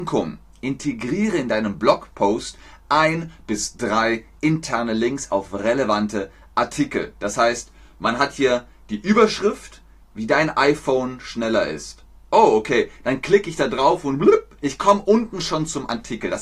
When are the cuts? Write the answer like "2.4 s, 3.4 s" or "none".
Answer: 10.0 s

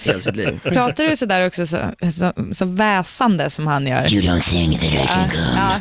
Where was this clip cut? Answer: none

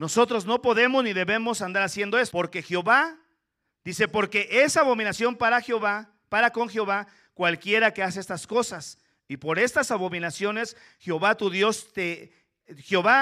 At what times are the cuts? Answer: 2.3 s

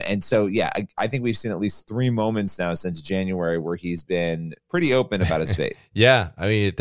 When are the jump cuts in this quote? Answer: 4.6 s

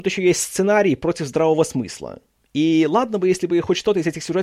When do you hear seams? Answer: 2.4 s

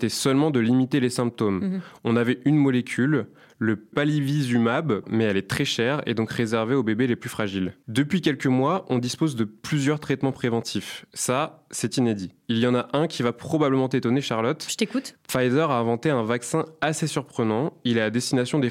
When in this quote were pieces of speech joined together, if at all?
5.0 s

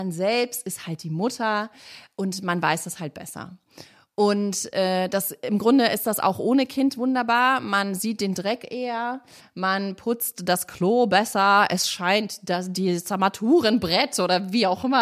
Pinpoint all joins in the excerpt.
none

